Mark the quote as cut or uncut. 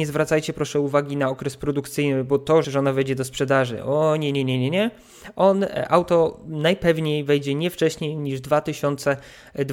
cut